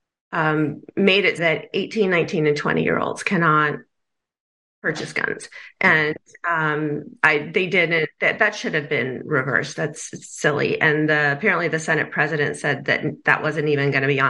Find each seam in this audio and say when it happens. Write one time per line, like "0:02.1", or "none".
0:01.4